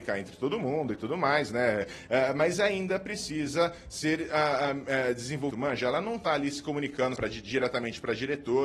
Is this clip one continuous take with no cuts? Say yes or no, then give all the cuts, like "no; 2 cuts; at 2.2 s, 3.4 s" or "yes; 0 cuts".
no; 2 cuts; at 5.5 s, 7.2 s